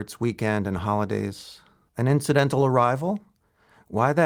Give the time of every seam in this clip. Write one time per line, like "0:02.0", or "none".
0:01.9